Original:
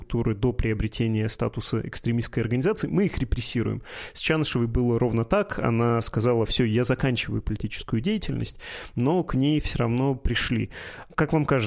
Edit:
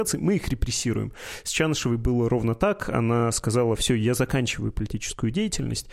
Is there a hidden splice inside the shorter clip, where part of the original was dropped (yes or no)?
no